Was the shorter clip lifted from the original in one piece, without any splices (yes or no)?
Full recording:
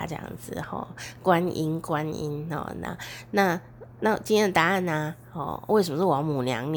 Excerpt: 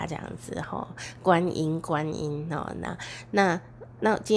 yes